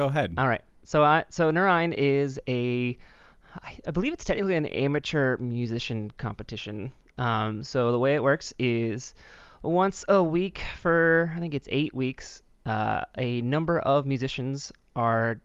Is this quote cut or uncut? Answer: uncut